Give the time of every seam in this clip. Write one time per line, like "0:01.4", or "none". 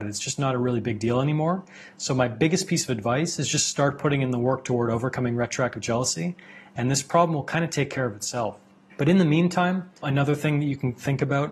0:10.0